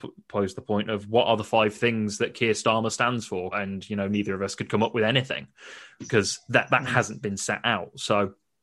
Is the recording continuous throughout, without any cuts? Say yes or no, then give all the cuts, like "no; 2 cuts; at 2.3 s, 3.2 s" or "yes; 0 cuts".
no; 1 cut; at 3.5 s